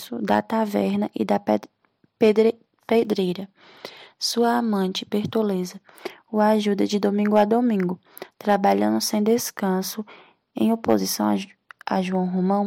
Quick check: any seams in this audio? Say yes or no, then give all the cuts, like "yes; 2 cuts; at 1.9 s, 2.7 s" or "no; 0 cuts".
no; 0 cuts